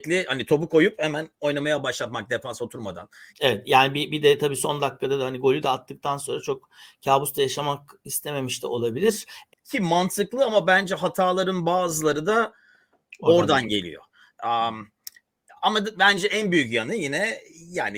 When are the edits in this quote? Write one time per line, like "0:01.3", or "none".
0:03.3
0:09.5